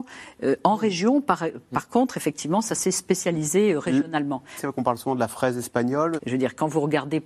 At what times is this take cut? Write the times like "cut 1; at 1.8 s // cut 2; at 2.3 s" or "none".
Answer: cut 1; at 4.6 s // cut 2; at 6.2 s